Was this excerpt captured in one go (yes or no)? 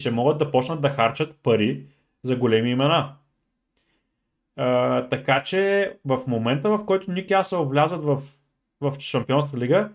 yes